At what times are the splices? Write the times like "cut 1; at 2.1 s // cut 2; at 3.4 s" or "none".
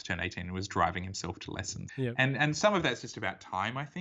cut 1; at 1.9 s